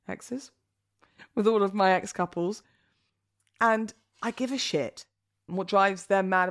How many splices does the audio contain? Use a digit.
1